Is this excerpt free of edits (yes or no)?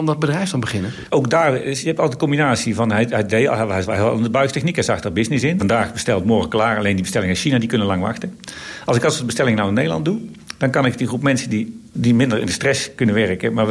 no